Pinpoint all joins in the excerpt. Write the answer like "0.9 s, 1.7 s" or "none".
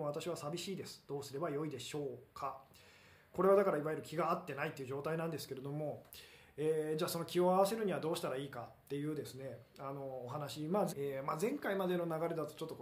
10.9 s